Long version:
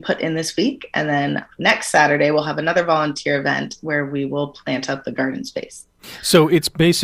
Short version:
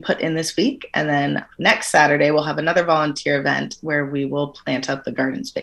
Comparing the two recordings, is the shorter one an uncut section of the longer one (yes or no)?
yes